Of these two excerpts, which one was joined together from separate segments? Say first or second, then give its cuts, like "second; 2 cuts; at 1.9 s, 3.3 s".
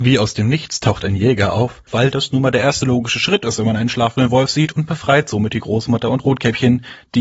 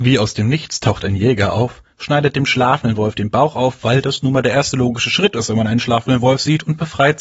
first; 1 cut; at 1.9 s